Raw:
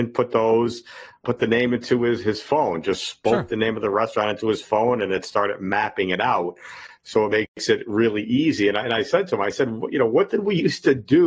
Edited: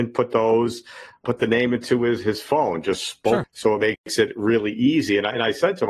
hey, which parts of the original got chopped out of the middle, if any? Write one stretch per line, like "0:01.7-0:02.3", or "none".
0:03.4-0:06.9